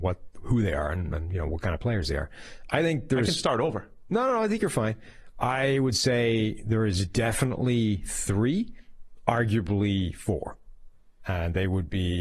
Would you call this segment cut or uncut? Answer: uncut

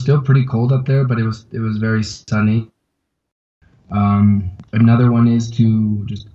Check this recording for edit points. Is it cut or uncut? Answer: cut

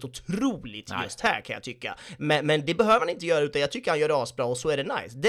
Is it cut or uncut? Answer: uncut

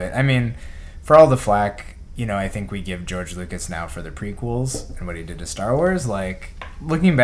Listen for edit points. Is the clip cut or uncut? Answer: uncut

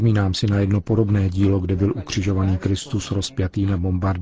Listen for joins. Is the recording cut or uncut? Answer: uncut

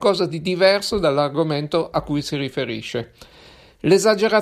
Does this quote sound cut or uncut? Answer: uncut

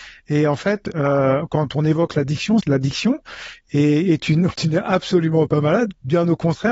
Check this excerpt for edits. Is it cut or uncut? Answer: cut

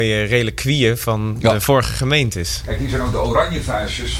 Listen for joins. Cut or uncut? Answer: uncut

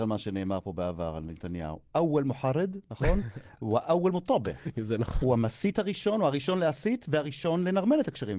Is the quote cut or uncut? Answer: uncut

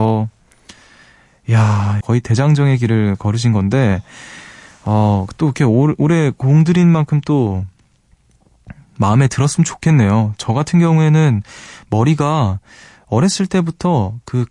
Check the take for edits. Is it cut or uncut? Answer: cut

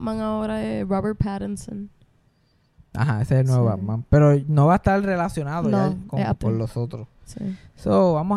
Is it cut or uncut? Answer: cut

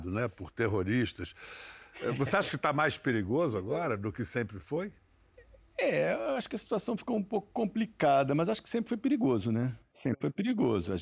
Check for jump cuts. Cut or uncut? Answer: uncut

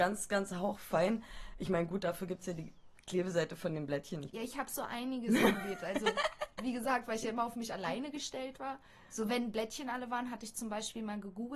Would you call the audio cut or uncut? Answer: cut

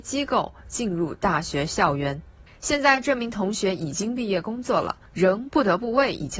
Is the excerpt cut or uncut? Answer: cut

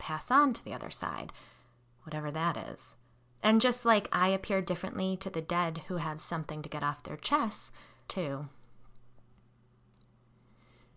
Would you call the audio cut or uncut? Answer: cut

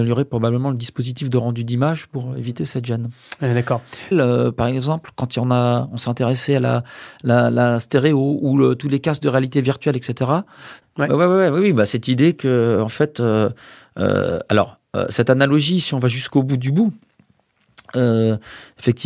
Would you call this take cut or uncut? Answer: cut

